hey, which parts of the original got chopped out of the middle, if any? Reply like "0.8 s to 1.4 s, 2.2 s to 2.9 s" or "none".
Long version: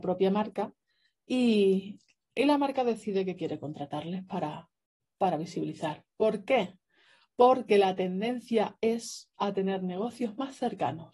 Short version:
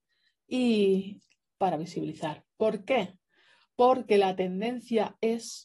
2.3 s to 5.1 s